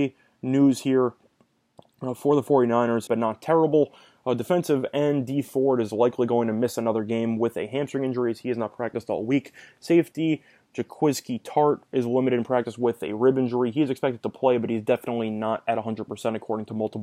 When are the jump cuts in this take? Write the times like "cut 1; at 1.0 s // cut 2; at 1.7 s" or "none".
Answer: cut 1; at 3.1 s